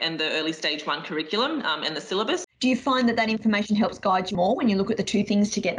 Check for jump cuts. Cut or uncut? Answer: cut